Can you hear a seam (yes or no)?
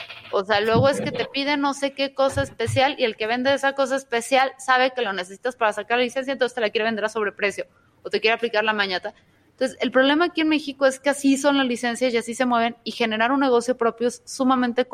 no